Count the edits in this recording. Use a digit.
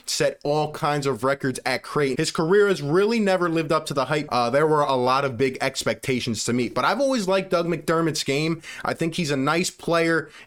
2